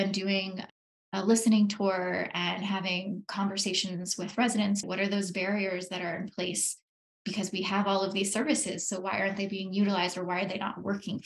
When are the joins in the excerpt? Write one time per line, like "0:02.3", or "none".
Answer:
0:04.8